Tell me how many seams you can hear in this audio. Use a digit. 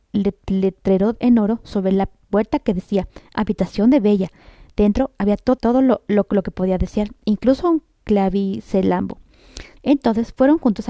2